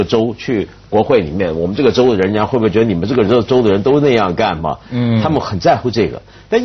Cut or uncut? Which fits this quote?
uncut